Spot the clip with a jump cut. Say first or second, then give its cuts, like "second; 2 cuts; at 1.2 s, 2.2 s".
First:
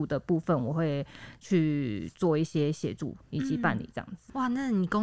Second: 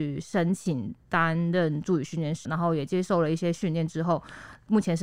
second; 1 cut; at 2.5 s